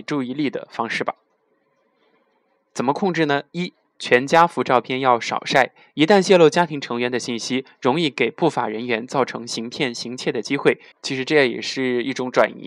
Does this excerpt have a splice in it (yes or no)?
yes